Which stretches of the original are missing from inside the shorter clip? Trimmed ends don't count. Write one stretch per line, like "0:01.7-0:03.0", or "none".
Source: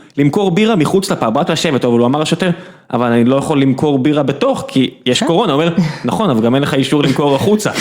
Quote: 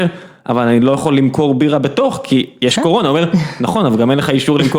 none